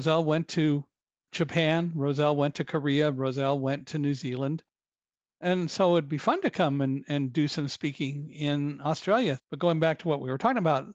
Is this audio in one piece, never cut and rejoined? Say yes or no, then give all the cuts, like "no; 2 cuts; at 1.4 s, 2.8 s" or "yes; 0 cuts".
no; 1 cut; at 9.4 s